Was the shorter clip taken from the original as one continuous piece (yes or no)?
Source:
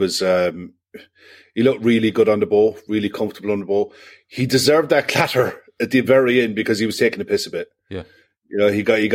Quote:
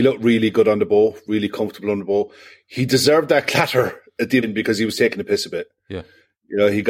no